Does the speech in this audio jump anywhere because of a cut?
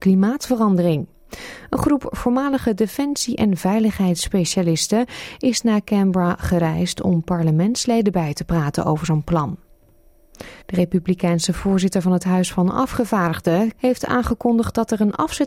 yes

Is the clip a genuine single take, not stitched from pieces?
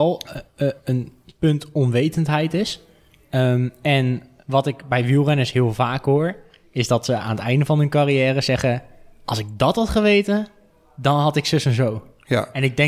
yes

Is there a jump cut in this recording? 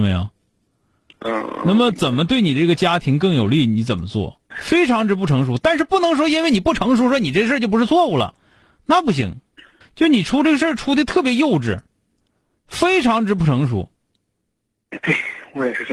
yes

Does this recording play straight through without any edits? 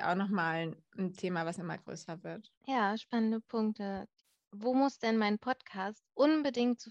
no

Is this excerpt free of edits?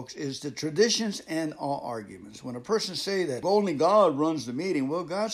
no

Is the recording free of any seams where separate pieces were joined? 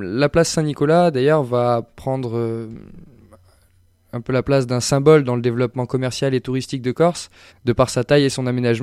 no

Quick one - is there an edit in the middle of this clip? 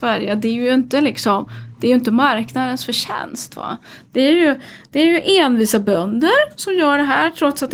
no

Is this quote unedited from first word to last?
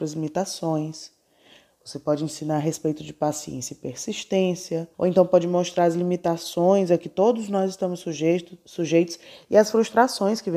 no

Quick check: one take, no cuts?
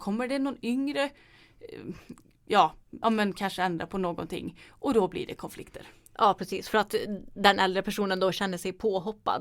no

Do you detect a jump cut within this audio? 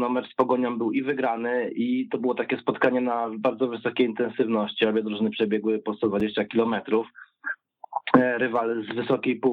no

